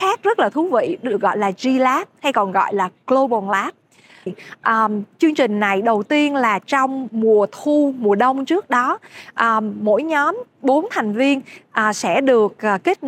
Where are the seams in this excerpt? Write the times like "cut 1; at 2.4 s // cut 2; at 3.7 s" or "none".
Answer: cut 1; at 4.3 s

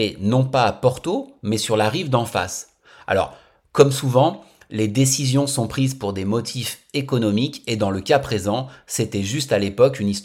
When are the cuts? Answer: none

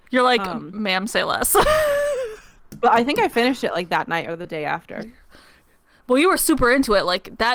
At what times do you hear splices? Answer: cut 1; at 5.0 s

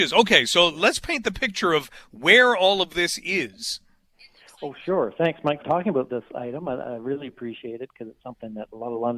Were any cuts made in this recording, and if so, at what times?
cut 1; at 5.6 s

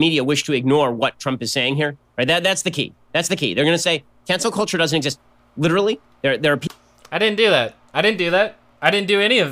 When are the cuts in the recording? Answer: cut 1; at 2.1 s

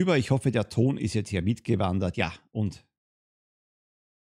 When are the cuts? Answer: none

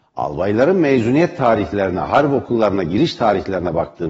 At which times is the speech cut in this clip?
none

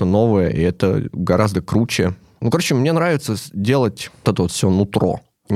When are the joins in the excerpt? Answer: cut 1; at 4.2 s

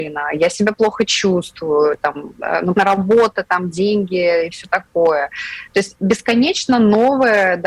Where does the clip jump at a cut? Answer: cut 1; at 2.7 s

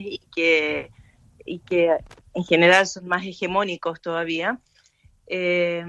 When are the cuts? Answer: none

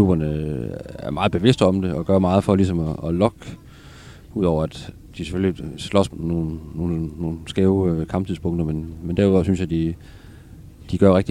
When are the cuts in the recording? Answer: cut 1; at 6.1 s

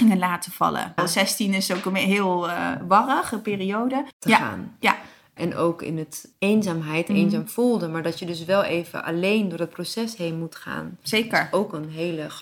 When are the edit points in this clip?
cut 1; at 1.0 s // cut 2; at 4.1 s // cut 3; at 7.1 s

